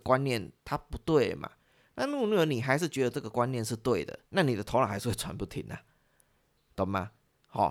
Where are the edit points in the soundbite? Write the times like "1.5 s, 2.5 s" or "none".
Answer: 4.3 s